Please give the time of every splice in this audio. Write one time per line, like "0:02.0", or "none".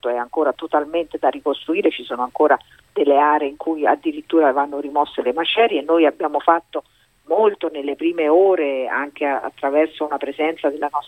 none